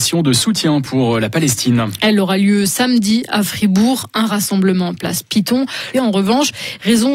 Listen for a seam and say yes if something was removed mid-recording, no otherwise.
yes